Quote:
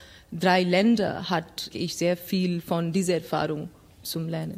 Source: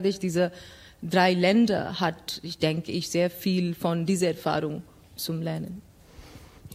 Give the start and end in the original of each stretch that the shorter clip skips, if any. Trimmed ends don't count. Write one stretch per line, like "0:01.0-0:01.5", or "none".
0:02.4-0:02.8